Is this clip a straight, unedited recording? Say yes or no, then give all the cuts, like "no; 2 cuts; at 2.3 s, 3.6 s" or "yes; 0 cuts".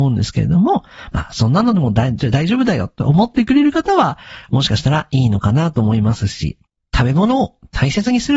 yes; 0 cuts